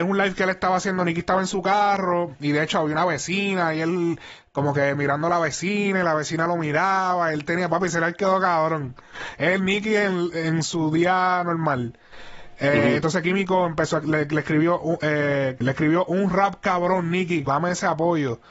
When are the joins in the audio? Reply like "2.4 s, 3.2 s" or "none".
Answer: 15.6 s, 17.5 s